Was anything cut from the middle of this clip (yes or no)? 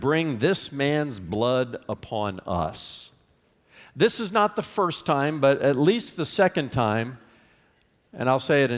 no